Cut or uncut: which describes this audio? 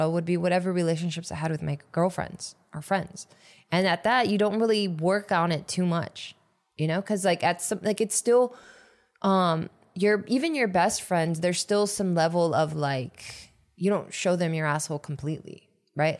uncut